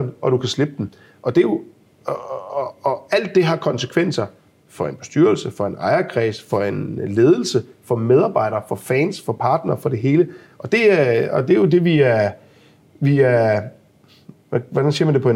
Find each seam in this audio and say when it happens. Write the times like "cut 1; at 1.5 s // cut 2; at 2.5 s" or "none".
none